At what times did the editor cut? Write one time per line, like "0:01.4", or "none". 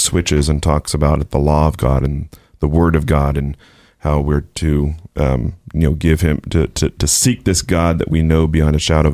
none